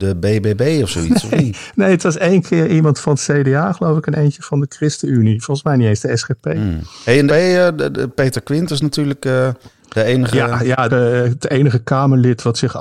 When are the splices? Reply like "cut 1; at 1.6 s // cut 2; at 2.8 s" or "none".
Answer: cut 1; at 7.3 s // cut 2; at 10.9 s